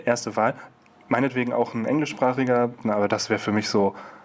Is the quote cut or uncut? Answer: cut